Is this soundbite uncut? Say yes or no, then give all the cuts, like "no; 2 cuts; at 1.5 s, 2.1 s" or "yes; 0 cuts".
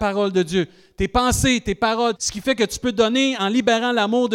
no; 1 cut; at 2.2 s